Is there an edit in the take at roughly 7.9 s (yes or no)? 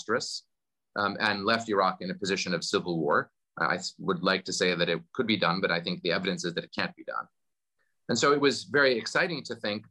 no